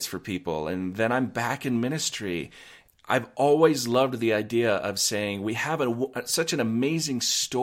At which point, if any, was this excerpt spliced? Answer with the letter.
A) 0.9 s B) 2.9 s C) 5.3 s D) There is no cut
B